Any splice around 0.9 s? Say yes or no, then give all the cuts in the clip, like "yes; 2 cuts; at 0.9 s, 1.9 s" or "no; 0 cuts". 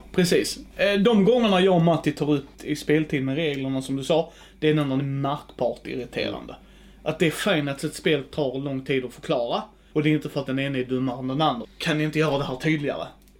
no; 3 cuts; at 2.5 s, 9.9 s, 11.6 s